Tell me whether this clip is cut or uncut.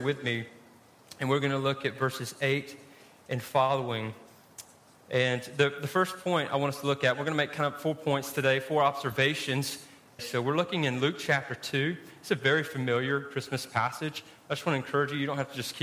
cut